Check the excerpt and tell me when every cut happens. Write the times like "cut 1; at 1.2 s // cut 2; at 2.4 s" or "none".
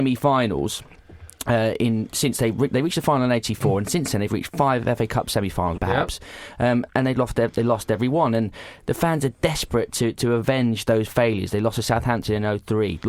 cut 1; at 5.8 s